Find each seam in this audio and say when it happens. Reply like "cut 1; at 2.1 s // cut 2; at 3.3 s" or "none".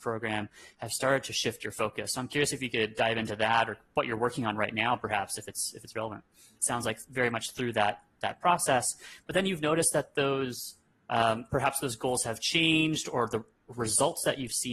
cut 1; at 6.6 s